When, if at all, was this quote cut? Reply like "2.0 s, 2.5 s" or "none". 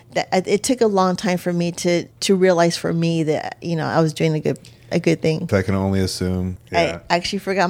2.1 s, 5.5 s, 6.6 s